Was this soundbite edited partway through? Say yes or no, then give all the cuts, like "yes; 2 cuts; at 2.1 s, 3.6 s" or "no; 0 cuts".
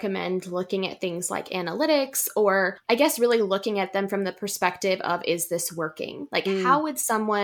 no; 0 cuts